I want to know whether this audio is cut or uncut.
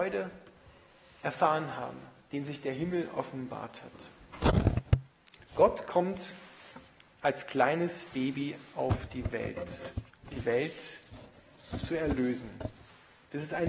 cut